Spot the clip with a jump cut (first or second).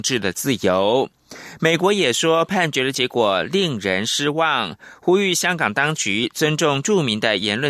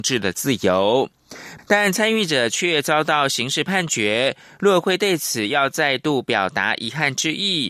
second